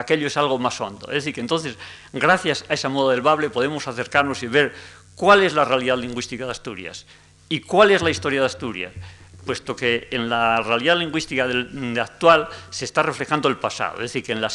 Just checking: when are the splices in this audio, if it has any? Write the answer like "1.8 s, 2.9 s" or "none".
none